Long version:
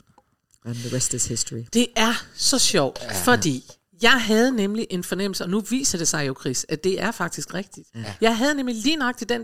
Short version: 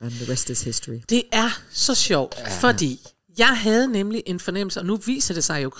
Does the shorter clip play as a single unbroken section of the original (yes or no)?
yes